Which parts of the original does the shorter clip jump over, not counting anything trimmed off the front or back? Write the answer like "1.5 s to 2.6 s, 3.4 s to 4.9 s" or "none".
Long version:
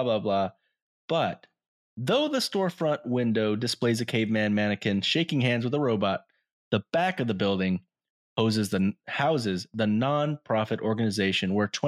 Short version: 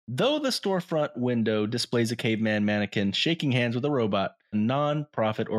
6.4 s to 9.8 s